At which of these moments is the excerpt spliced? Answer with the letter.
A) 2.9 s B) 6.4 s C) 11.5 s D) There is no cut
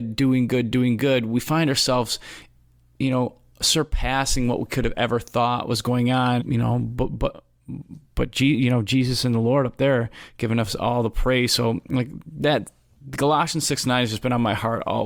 B